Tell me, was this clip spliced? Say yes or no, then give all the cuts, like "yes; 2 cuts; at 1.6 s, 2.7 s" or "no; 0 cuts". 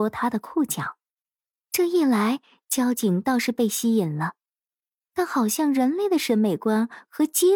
yes; 1 cut; at 1.7 s